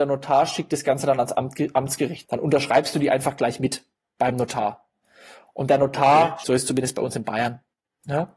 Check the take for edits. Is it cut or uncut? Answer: cut